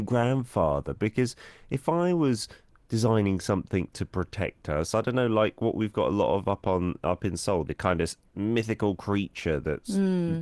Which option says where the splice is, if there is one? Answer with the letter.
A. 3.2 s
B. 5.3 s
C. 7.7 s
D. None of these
C